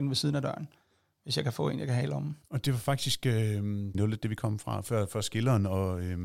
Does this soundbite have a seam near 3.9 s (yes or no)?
yes